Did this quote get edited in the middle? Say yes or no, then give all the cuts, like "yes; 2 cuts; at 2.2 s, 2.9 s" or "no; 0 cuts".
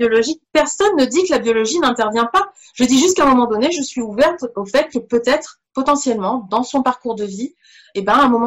no; 0 cuts